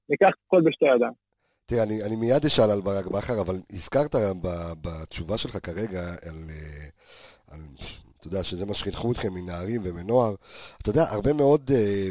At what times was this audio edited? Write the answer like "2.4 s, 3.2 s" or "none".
none